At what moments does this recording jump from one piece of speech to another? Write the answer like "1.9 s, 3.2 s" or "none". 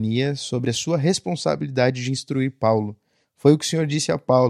3.2 s